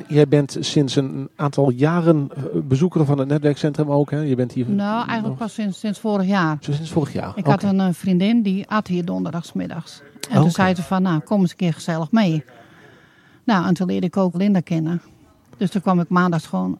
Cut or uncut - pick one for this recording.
cut